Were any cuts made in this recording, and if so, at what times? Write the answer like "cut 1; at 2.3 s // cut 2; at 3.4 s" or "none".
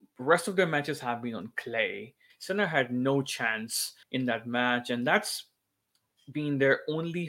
cut 1; at 2.3 s // cut 2; at 4.0 s